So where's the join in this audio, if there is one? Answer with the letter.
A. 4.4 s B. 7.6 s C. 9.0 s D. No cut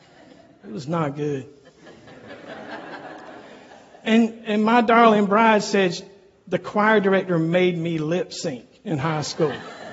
A